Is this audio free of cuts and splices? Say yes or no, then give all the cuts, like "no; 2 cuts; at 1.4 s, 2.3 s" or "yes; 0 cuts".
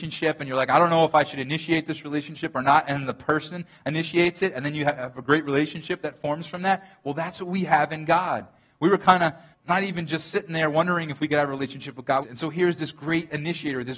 no; 2 cuts; at 9.5 s, 12.2 s